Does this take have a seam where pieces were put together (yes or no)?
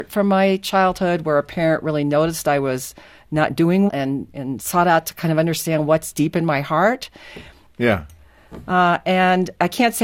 yes